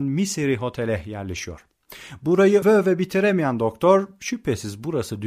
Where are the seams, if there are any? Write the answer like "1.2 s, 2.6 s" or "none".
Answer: 2.6 s

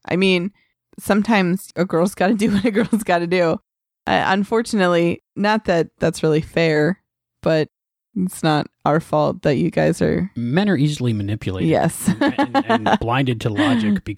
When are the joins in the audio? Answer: none

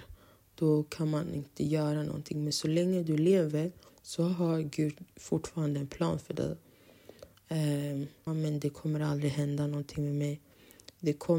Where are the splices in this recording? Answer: 8.3 s

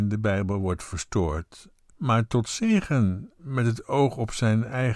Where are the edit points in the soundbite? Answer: 1.9 s

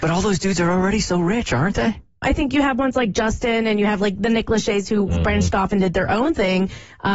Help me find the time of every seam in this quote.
2.2 s

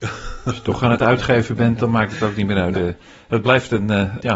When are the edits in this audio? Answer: 2.8 s

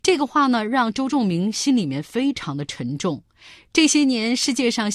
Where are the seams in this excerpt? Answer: none

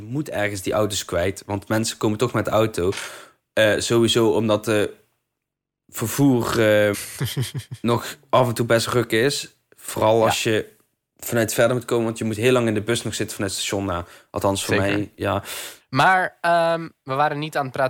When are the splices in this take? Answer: 6.9 s, 15.8 s

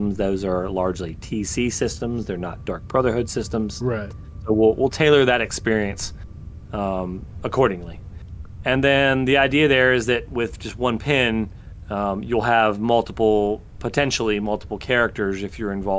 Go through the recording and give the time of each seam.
none

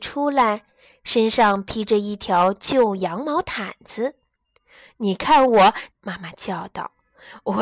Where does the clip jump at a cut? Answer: 5.9 s

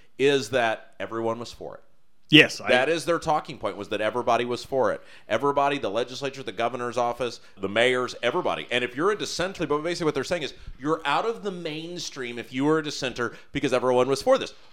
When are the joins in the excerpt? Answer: 7.6 s, 9.6 s

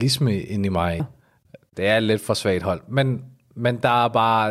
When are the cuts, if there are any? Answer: 1.0 s

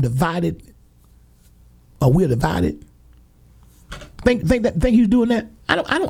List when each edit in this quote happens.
4.4 s

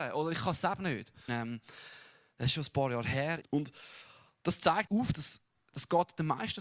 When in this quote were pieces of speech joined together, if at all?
1.3 s, 3.4 s, 4.9 s

